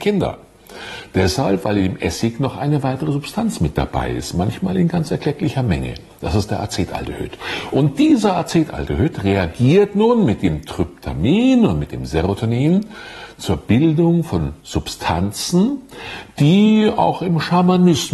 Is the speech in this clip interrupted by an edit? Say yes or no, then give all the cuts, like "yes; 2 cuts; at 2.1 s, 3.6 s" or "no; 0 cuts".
no; 0 cuts